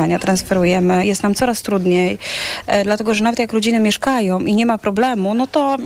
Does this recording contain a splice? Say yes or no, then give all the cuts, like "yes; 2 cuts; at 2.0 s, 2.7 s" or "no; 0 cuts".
no; 0 cuts